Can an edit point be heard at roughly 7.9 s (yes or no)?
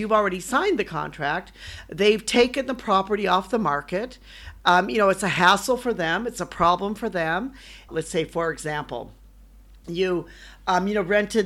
yes